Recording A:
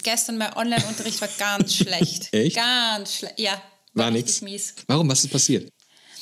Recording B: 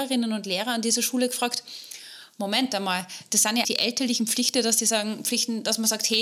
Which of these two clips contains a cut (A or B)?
B